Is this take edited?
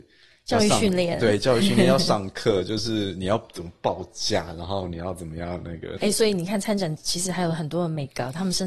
yes; 1 cut; at 6.0 s

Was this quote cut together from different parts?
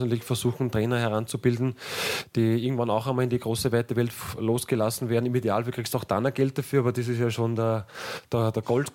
no; 0 cuts

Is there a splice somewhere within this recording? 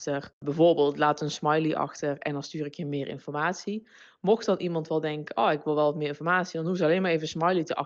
no; 0 cuts

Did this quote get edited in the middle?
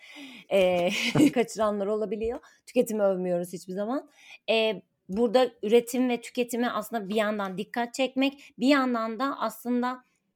yes; 1 cut; at 1.3 s

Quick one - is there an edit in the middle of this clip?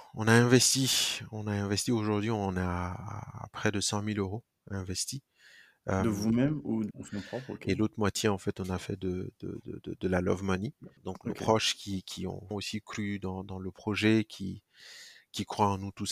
yes; 3 cuts; at 6.9 s, 11.0 s, 12.5 s

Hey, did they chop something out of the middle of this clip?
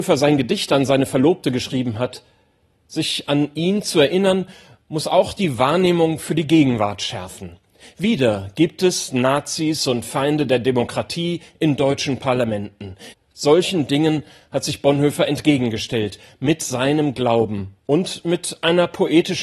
yes; 2 cuts; at 13.1 s, 17.8 s

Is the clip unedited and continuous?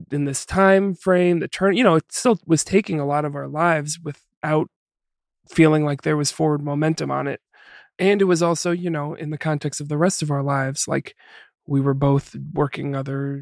yes; 0 cuts

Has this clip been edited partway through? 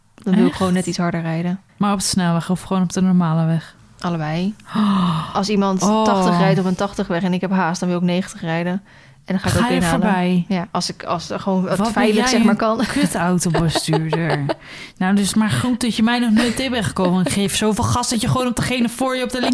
yes; 1 cut; at 1.7 s

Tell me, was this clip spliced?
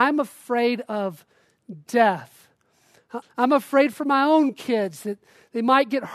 yes; 1 cut; at 3.2 s

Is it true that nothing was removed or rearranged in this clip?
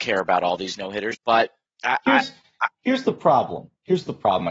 no; 1 cut; at 1.1 s

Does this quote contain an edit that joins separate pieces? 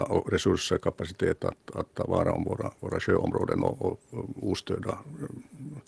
yes; 1 cut; at 1.9 s

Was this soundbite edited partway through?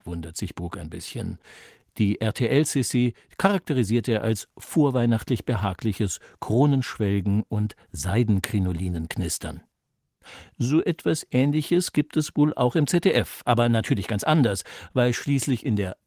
no; 0 cuts

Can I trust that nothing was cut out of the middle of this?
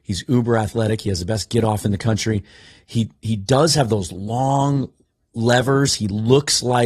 yes; 0 cuts

